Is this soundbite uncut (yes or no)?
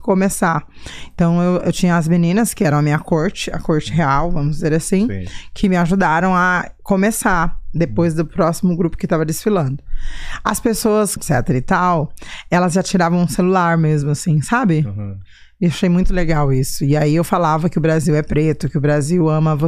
no